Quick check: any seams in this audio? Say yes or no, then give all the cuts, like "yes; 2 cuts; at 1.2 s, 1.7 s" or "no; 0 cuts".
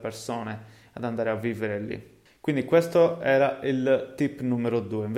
yes; 1 cut; at 2.3 s